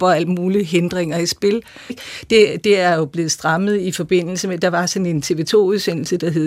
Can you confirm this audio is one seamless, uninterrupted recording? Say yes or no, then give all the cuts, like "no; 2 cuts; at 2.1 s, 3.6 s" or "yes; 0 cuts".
no; 1 cut; at 1.9 s